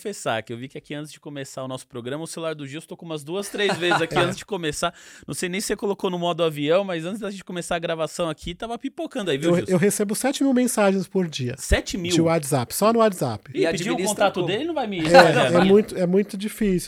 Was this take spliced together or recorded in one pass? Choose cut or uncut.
uncut